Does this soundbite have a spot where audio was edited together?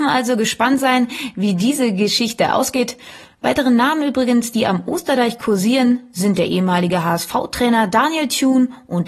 no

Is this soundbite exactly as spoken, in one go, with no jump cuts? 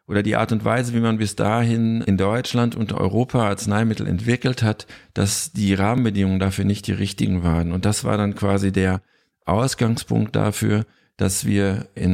yes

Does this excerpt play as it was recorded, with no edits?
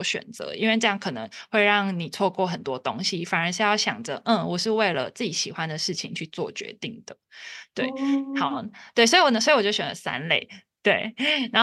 yes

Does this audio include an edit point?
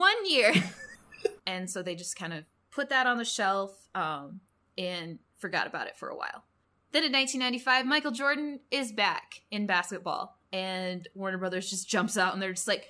yes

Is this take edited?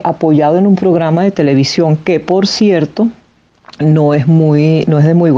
no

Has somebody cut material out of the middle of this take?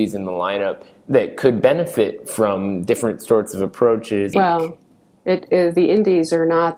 yes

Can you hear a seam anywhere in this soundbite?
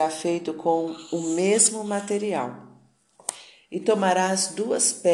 no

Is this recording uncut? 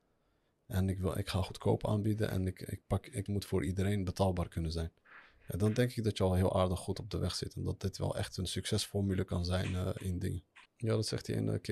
no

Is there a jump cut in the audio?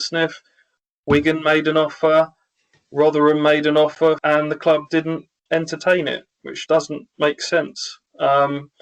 yes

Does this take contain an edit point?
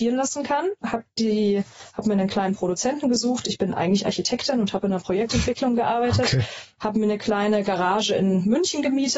no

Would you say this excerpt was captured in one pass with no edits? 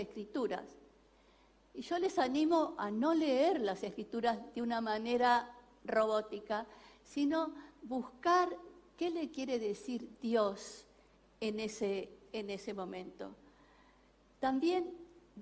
yes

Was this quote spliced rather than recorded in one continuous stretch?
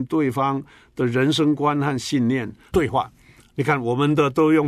yes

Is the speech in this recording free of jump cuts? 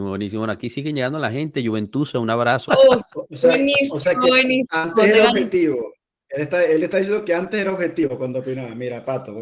no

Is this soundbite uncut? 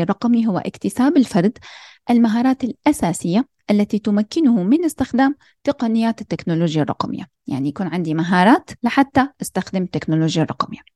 no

